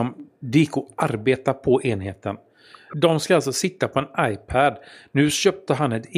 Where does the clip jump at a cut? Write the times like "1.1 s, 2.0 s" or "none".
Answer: 2.9 s